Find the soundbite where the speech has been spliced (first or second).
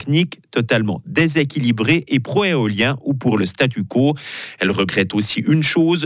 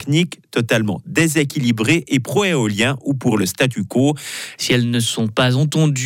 second